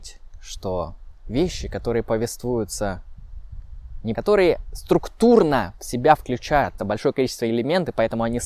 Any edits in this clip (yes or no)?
yes